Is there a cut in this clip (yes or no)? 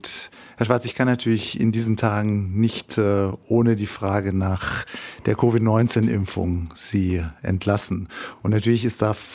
no